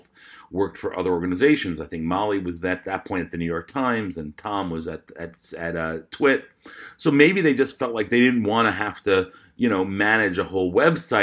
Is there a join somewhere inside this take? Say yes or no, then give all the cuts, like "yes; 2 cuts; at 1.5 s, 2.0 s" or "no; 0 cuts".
no; 0 cuts